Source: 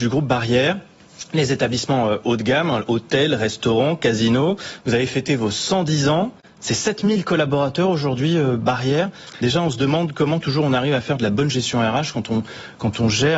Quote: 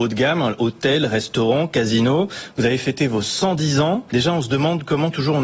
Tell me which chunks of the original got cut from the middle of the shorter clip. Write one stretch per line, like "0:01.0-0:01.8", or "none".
0:06.4-0:09.4